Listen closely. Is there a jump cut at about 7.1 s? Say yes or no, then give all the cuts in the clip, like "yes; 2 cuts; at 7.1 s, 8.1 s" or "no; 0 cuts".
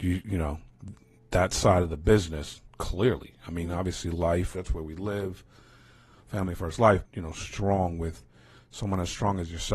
yes; 2 cuts; at 4.5 s, 7.1 s